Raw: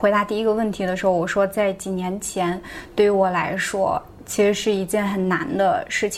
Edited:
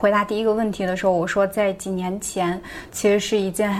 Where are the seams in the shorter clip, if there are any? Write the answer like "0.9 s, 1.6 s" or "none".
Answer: 2.9 s